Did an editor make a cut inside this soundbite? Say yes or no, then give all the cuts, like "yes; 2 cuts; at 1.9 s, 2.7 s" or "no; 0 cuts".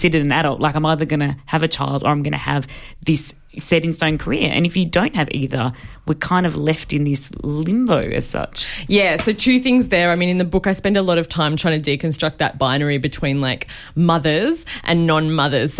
no; 0 cuts